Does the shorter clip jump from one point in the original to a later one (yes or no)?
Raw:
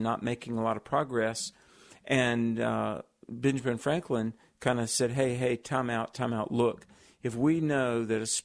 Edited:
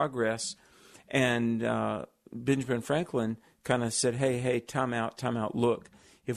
no